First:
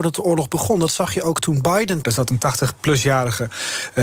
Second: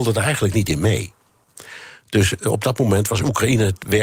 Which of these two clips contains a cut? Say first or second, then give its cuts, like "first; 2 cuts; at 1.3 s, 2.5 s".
first; 1 cut; at 2.0 s